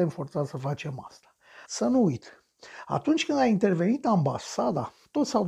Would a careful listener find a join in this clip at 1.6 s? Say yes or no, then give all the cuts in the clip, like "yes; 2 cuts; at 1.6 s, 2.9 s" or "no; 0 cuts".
yes; 2 cuts; at 1.6 s, 2.8 s